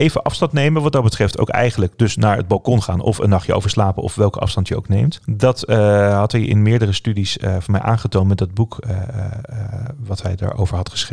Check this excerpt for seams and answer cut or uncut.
uncut